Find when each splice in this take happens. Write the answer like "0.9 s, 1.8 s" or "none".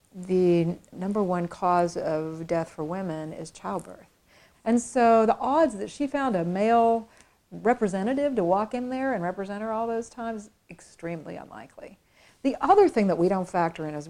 4.5 s